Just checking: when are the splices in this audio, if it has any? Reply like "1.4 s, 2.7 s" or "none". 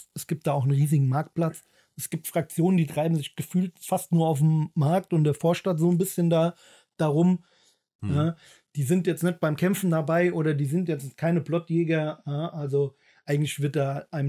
8.0 s